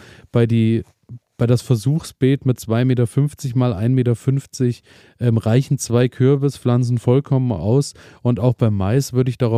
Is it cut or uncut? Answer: uncut